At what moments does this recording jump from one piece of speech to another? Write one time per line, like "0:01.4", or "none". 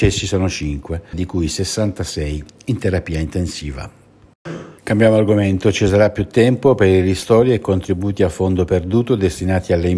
0:01.1
0:04.8